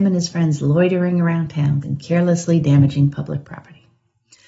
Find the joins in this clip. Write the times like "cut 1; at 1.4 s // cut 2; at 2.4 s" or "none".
cut 1; at 1.8 s